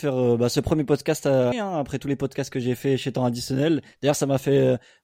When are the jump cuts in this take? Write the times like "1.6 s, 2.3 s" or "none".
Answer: 1.5 s